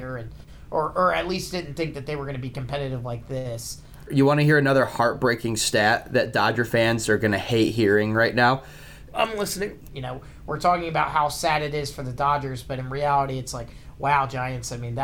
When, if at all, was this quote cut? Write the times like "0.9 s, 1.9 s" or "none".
4.1 s, 9.9 s